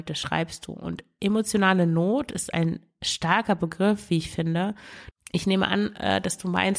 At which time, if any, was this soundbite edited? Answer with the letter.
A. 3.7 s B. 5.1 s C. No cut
B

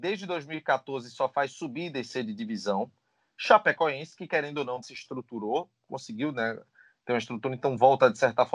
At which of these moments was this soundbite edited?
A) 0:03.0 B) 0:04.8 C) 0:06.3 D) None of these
B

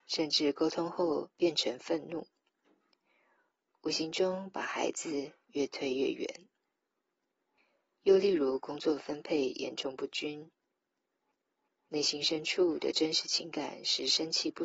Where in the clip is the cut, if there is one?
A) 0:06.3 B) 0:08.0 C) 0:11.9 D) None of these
B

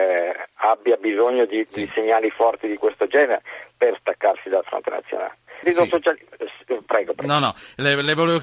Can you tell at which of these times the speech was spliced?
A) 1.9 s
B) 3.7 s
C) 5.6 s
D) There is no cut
C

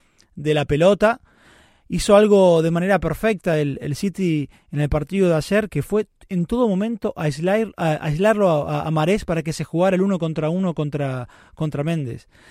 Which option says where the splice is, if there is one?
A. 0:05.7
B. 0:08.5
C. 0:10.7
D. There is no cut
A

